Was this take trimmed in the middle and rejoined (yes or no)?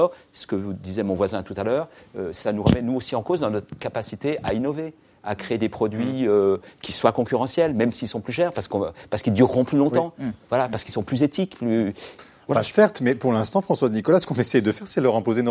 no